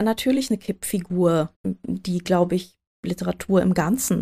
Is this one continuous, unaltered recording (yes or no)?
no